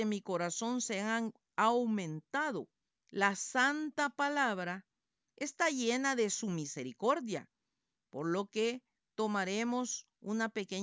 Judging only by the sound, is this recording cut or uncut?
cut